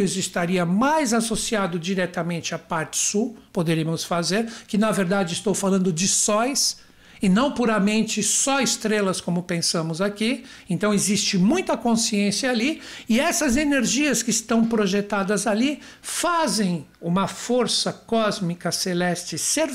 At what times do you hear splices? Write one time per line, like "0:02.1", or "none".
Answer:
none